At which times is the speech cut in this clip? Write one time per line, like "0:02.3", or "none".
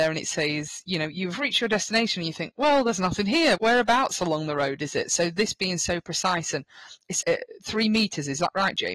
0:03.6
0:07.2